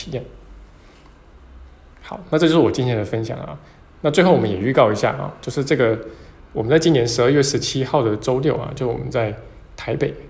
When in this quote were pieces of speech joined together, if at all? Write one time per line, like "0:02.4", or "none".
none